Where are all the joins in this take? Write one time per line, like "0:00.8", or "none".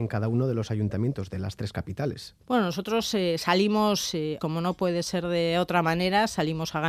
0:02.4
0:04.4

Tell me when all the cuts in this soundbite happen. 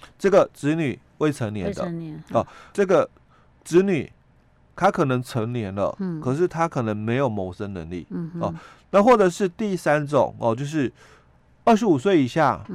0:02.7

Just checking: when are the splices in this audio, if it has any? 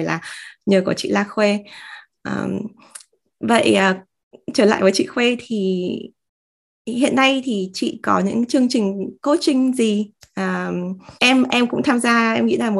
0:11.2

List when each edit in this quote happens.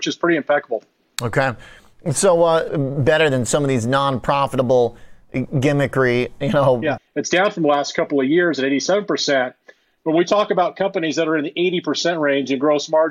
0:02.7
0:07.0

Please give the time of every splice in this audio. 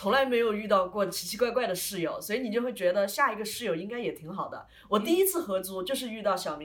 none

